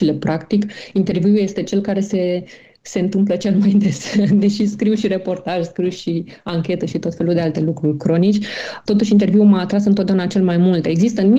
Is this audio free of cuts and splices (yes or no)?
yes